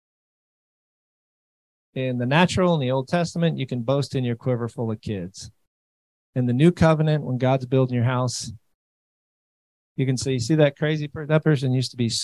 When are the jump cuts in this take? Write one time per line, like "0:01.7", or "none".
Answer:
none